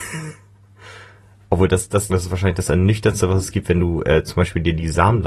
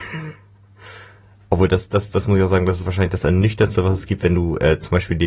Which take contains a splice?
first; 1 cut; at 2.1 s

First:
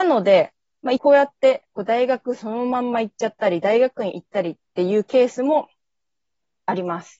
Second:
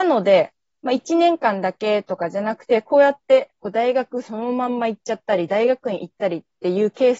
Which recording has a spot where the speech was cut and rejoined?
first; 1 cut; at 1.0 s

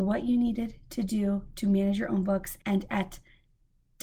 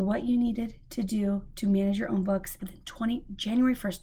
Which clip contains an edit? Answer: second; 1 cut; at 2.6 s

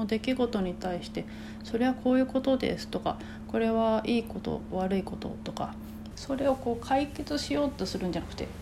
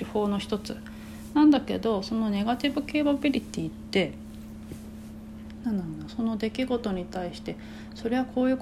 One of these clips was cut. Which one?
first; 1 cut; at 6.1 s

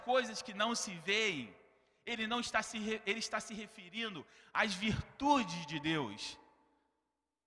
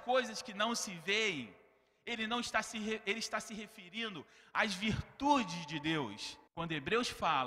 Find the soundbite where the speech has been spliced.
second; 1 cut; at 6.5 s

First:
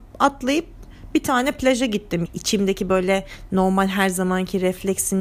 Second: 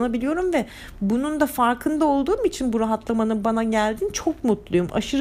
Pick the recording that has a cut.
first; 1 cut; at 2.3 s

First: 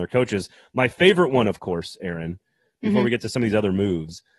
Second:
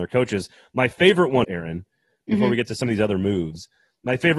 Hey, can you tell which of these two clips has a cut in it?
second; 1 cut; at 1.4 s

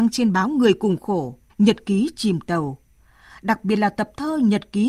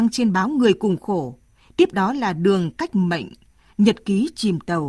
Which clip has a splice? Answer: first; 1 cut; at 1.5 s

